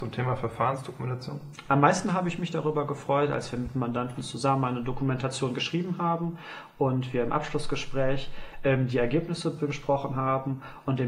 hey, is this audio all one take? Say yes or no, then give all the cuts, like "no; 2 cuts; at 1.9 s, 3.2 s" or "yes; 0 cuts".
yes; 0 cuts